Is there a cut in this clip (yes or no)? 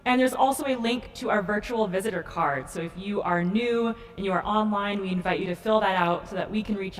no